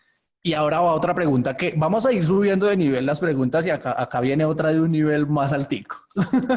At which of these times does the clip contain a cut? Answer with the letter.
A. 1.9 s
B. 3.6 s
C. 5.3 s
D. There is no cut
D